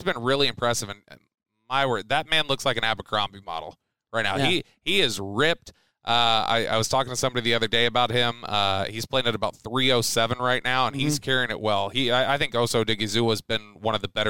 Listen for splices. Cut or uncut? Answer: uncut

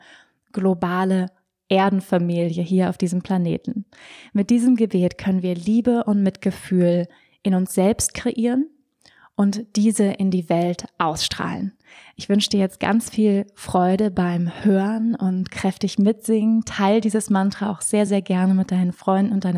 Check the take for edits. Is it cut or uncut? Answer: uncut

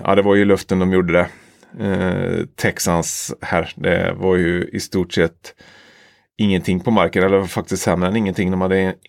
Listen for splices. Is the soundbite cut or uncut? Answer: uncut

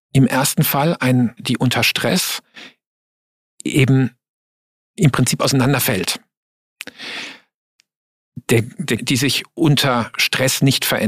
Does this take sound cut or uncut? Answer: cut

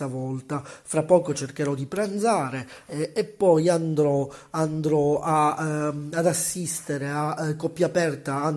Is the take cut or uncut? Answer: uncut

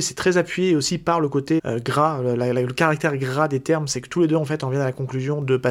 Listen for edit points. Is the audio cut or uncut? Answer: cut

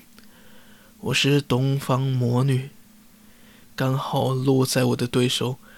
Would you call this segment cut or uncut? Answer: cut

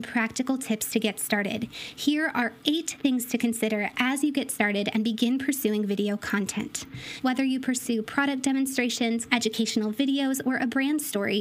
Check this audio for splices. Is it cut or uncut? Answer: cut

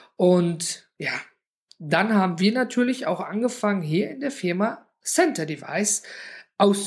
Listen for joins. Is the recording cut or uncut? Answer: uncut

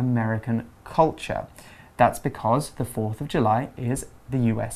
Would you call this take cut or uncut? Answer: uncut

